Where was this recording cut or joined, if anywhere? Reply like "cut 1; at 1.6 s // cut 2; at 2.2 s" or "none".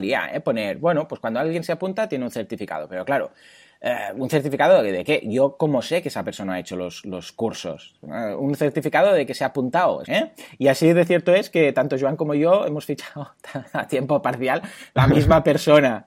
cut 1; at 10.0 s